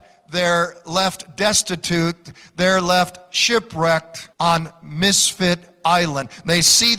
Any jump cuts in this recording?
yes; 1 cut; at 4.3 s

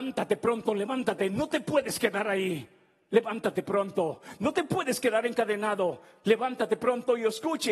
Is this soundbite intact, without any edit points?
yes; 0 cuts

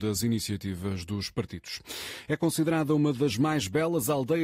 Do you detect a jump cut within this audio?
no; 0 cuts

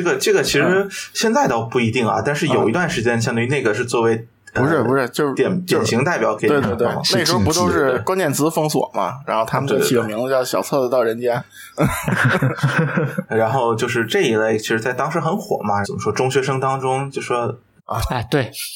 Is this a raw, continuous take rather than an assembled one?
no; 3 cuts; at 6.4 s, 15.8 s, 17.8 s

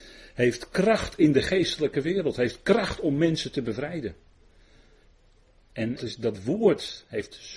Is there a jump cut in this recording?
yes; 1 cut; at 6.0 s

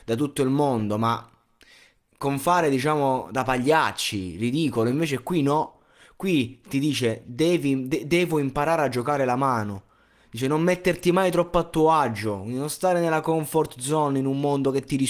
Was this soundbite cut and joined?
no; 0 cuts

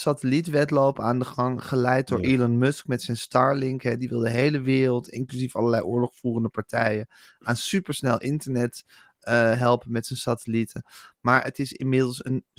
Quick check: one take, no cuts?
yes; 0 cuts

